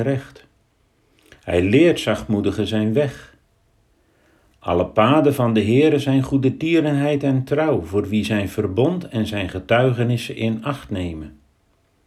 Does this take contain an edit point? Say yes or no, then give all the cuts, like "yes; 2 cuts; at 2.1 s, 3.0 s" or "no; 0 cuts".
no; 0 cuts